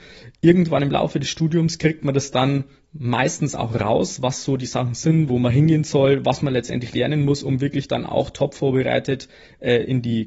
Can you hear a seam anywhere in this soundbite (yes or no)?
yes